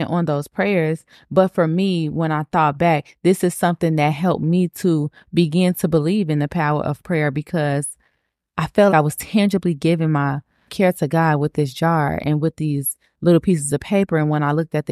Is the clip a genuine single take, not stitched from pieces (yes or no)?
no